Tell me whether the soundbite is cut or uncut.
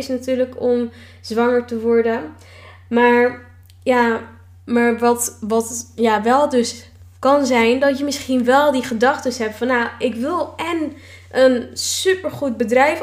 uncut